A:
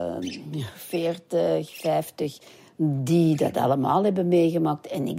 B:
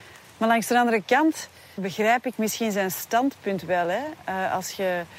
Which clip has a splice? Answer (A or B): B